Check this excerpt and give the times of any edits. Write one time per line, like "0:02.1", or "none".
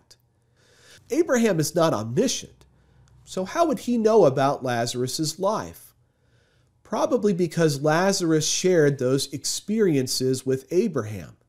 0:01.0